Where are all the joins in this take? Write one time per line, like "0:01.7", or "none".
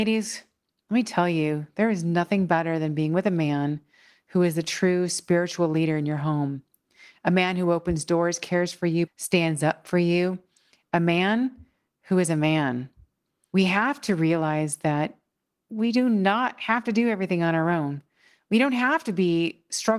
0:09.1